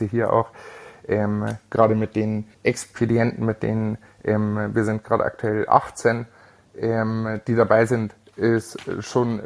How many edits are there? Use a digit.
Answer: 1